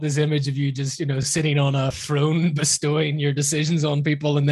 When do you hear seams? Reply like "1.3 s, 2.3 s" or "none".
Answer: none